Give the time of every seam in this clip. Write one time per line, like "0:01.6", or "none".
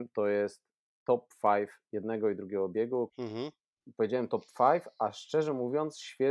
0:03.1